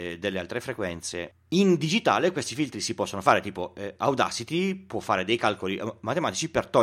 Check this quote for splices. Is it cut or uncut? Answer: cut